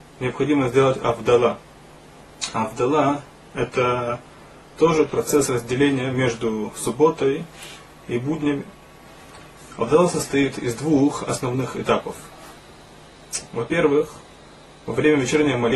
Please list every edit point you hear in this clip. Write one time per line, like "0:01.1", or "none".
none